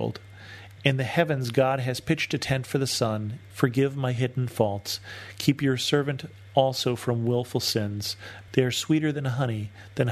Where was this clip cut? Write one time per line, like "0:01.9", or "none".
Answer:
0:03.5
0:08.5